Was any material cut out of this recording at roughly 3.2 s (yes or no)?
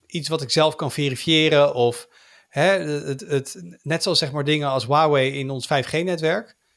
no